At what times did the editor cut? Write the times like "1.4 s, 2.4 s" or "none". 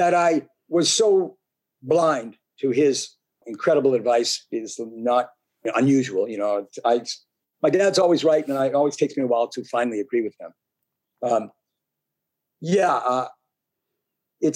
3.4 s